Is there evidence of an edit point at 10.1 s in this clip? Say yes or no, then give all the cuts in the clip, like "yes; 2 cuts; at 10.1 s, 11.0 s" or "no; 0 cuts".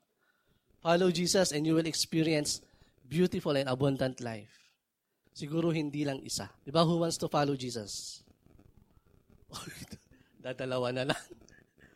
no; 2 cuts; at 5.2 s, 6.6 s